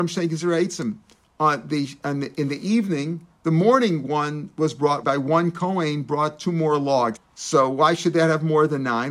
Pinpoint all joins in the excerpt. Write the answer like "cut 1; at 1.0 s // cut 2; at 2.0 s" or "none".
cut 1; at 5.0 s // cut 2; at 7.2 s